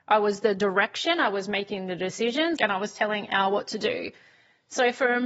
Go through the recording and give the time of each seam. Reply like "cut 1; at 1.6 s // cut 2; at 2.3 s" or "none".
cut 1; at 2.6 s